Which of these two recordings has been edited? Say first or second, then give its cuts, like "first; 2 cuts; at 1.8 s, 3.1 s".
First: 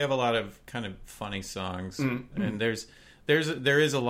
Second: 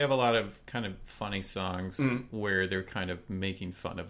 first; 1 cut; at 2.3 s